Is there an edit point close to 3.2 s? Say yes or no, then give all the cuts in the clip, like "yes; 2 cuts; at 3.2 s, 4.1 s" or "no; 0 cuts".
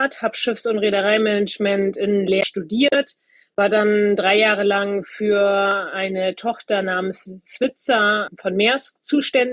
no; 0 cuts